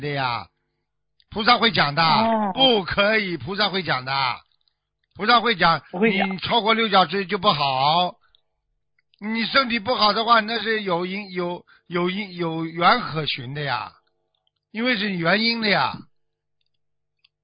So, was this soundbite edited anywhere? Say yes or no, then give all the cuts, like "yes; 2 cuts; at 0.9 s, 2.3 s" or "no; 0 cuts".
no; 0 cuts